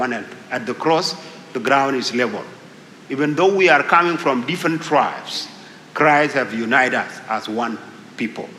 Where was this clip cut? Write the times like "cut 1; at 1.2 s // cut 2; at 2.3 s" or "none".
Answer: cut 1; at 3.0 s